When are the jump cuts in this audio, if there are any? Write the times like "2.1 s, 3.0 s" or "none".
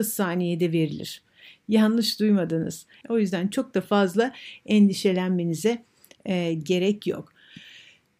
3.0 s